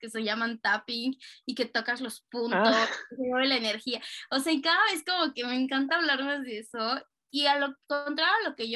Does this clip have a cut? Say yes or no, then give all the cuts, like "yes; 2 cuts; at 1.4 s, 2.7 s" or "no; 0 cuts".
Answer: no; 0 cuts